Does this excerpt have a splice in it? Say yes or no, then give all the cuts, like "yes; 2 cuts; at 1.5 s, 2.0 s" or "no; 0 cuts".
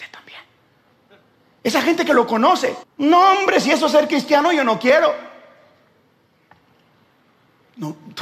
yes; 1 cut; at 2.8 s